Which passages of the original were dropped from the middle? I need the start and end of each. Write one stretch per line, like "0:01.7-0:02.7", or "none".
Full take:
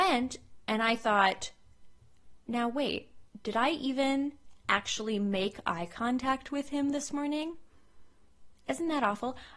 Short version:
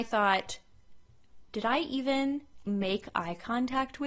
0:02.4-0:03.4
0:04.6-0:05.2